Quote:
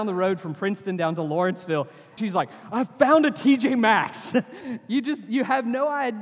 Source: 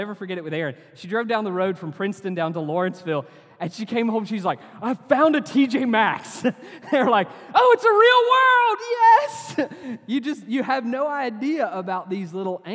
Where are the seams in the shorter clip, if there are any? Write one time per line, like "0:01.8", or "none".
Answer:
0:02.2
0:04.6